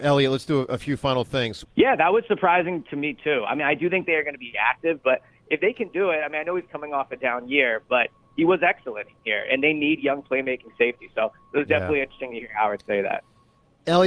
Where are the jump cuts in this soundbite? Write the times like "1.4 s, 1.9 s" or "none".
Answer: 1.6 s, 5.0 s